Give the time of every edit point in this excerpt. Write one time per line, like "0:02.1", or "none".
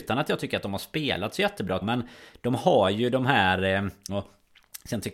0:01.8
0:04.1